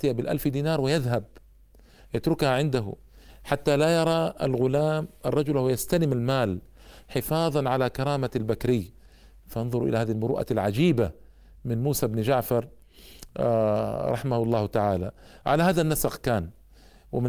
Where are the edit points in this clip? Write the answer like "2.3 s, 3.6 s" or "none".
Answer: none